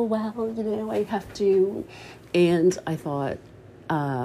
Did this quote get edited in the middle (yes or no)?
no